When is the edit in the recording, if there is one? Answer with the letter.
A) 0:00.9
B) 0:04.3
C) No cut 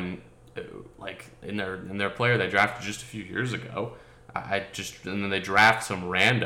C